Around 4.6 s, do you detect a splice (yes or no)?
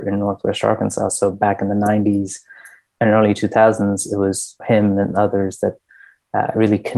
yes